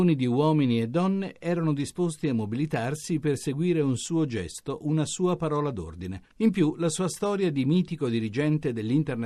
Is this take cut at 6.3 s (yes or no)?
yes